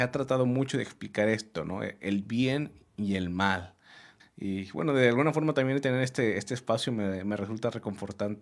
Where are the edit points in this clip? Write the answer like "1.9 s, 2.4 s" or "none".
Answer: 4.2 s